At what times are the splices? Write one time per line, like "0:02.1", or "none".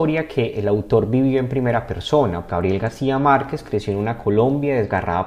0:02.5